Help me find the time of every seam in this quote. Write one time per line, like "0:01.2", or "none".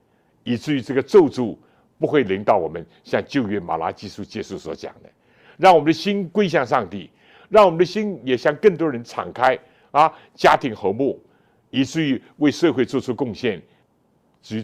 none